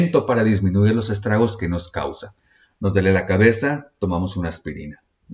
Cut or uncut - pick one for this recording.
uncut